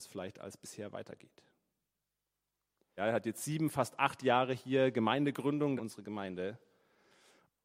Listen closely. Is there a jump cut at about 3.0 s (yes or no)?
yes